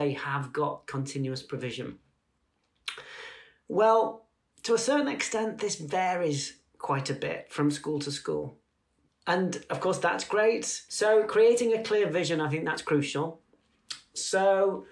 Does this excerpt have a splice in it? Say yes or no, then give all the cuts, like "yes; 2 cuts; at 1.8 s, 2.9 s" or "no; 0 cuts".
yes; 2 cuts; at 9.1 s, 10.9 s